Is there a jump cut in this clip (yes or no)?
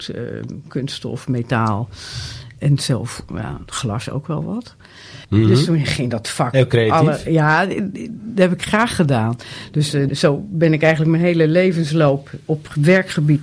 yes